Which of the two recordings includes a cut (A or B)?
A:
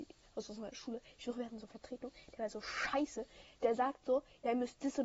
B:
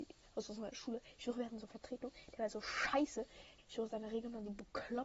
B